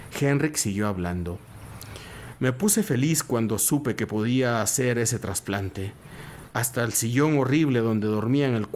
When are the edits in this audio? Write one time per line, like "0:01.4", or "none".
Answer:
none

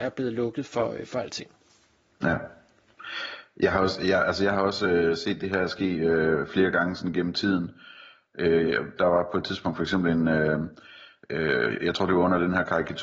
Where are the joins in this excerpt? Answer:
none

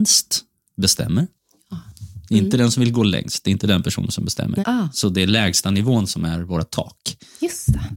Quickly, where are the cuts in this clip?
0:04.6

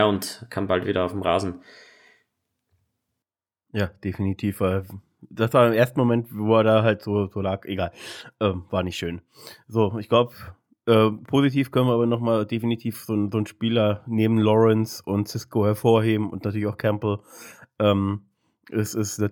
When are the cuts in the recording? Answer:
none

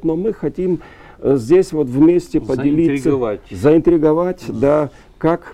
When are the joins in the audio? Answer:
none

